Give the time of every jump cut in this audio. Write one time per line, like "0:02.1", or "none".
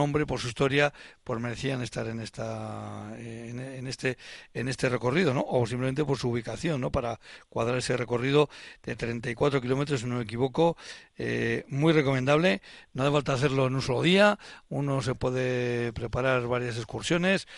none